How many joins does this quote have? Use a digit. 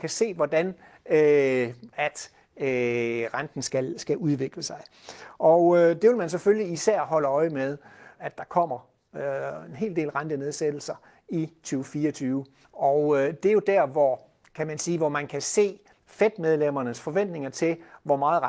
3